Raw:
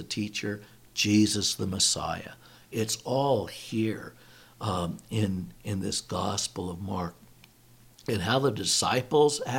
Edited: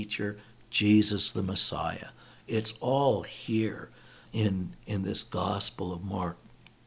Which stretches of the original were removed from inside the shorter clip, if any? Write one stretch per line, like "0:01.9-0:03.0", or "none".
0:04.5-0:05.0